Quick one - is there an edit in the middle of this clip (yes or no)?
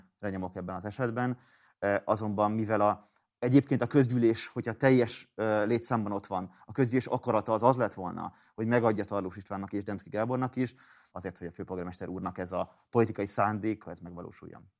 yes